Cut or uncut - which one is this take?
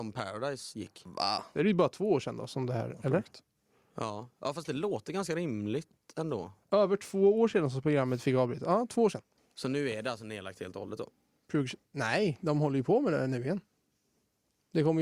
cut